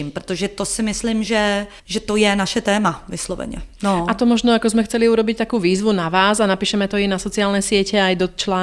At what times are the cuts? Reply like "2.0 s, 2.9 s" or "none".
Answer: 1.8 s